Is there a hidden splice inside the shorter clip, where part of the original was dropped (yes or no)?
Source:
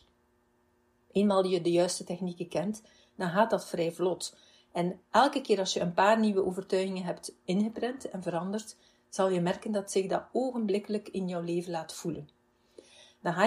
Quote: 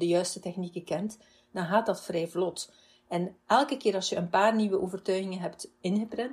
no